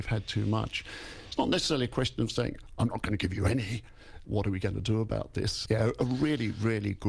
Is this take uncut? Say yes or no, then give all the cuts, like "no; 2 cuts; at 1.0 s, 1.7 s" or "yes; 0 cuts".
no; 2 cuts; at 4.2 s, 5.7 s